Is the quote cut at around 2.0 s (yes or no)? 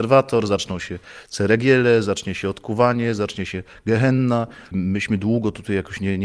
no